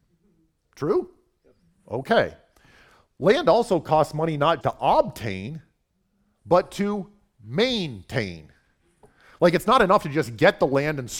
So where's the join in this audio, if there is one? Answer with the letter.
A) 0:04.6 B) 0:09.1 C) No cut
A